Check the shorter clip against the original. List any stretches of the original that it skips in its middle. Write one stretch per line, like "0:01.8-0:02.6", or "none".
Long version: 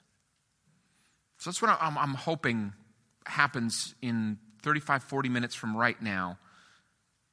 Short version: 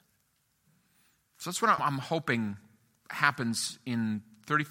0:01.8-0:01.9

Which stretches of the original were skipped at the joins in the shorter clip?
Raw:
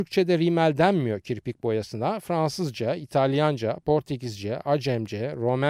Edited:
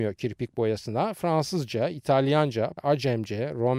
0:03.8-0:04.6

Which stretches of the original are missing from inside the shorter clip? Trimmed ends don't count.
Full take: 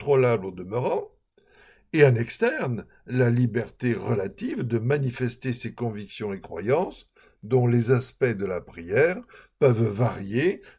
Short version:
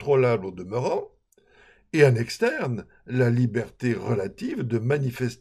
none

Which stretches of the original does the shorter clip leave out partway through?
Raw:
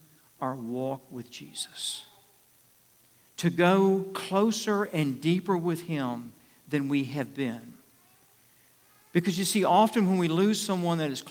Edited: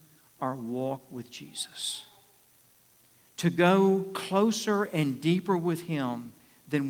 none

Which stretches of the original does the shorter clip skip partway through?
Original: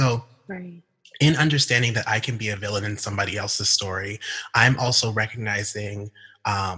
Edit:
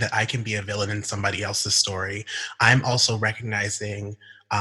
none

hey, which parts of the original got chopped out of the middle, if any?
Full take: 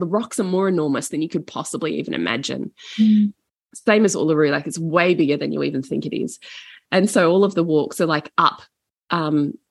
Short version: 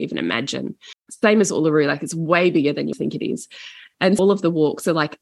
0:02.9-0:03.6
0:05.6-0:05.8
0:07.1-0:07.3

